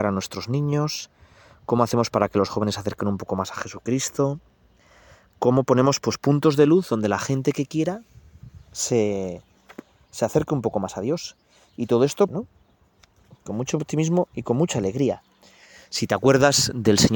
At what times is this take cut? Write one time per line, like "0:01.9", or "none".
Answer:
0:12.3